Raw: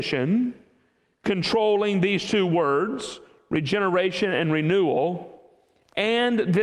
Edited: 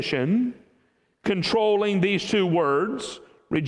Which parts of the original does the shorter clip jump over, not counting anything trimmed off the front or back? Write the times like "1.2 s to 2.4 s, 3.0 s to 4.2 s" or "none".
none